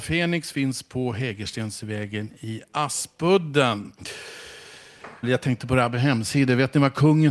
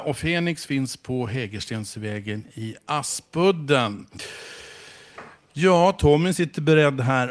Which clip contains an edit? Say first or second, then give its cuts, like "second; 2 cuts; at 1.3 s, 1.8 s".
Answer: first; 1 cut; at 5.2 s